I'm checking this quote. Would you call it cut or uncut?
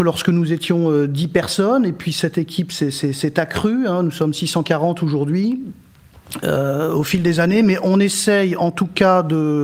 uncut